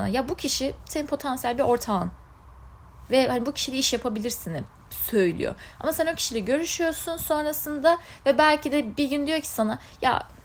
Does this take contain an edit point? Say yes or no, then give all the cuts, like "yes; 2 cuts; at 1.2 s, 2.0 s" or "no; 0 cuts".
no; 0 cuts